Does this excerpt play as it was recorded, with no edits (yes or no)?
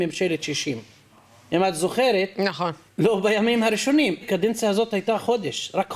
no